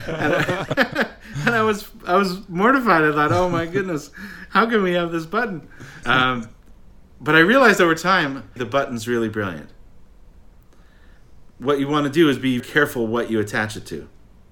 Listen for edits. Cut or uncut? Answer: cut